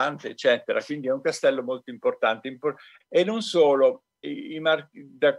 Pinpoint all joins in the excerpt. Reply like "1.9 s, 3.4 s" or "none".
3.0 s, 4.2 s